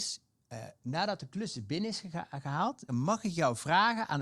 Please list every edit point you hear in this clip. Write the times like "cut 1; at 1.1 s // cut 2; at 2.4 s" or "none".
cut 1; at 2.9 s